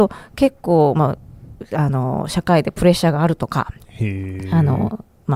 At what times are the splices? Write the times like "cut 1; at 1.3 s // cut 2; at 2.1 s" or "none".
none